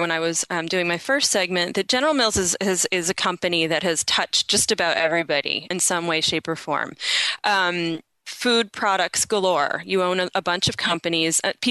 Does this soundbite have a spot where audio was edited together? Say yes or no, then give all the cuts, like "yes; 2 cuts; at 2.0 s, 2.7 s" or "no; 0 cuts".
no; 0 cuts